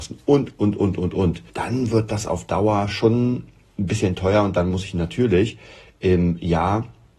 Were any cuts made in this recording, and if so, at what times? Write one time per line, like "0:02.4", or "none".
0:01.5